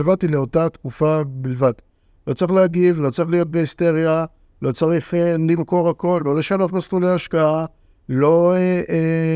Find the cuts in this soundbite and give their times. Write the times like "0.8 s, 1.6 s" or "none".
none